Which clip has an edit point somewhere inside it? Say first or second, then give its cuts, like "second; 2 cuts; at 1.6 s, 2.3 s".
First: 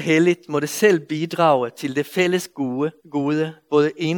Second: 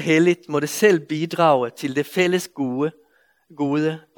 first; 1 cut; at 3.0 s